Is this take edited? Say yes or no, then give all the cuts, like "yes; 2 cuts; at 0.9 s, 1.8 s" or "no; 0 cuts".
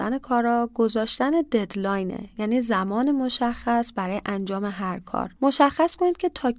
yes; 1 cut; at 5.4 s